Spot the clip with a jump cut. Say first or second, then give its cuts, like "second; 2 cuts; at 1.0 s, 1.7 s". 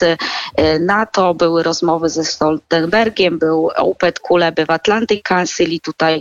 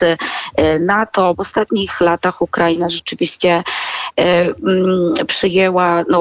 second; 1 cut; at 1.3 s